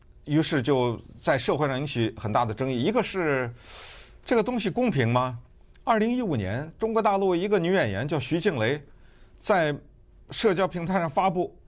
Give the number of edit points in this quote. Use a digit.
0